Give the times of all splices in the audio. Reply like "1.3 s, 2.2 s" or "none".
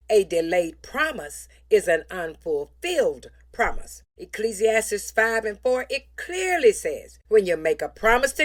none